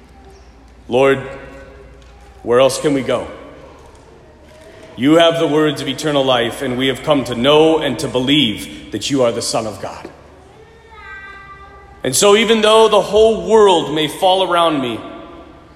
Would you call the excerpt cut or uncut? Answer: uncut